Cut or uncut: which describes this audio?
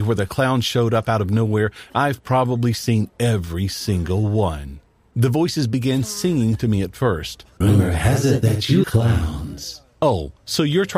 cut